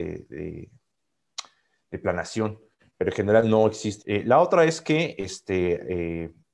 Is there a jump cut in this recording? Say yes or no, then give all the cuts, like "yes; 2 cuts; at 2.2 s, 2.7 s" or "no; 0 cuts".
yes; 1 cut; at 4.0 s